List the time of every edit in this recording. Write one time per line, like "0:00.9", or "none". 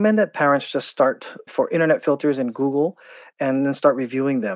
0:01.5